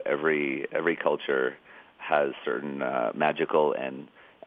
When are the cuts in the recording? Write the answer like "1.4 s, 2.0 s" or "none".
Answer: none